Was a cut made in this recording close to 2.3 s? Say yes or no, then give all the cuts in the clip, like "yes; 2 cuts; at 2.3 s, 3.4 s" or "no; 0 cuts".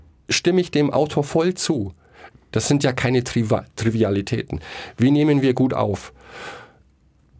yes; 1 cut; at 2.3 s